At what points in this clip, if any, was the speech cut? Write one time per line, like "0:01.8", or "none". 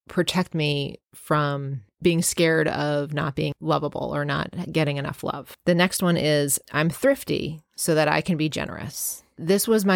0:06.6